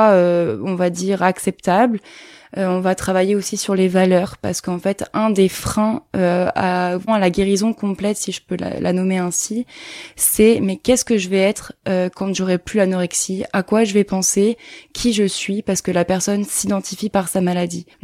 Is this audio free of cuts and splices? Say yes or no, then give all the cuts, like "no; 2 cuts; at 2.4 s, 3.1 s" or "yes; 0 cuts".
no; 1 cut; at 7.1 s